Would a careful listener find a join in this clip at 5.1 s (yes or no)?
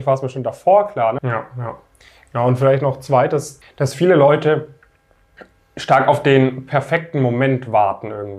no